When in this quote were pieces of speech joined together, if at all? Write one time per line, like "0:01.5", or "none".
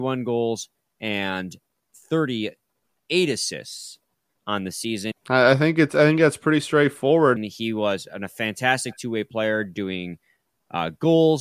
0:05.1
0:07.4